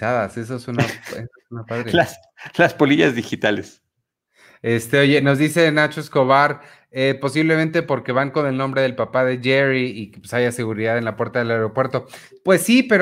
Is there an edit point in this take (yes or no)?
no